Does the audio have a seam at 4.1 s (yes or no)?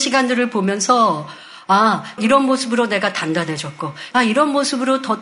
yes